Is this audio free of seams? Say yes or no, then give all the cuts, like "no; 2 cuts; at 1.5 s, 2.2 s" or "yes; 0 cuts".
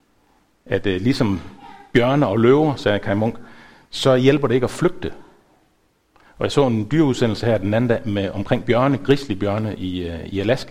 yes; 0 cuts